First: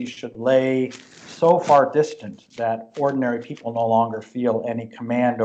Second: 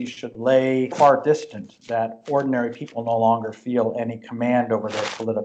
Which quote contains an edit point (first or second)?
second